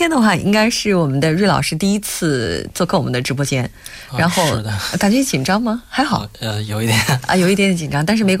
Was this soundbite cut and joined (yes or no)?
no